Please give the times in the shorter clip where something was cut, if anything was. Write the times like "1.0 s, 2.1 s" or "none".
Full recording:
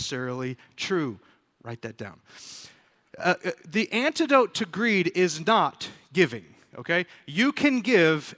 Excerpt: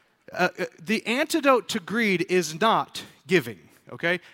none